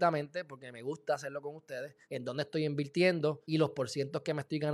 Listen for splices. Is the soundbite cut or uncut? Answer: cut